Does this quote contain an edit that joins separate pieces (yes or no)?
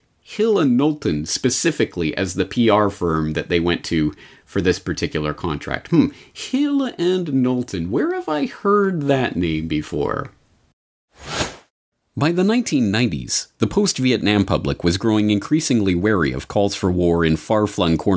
no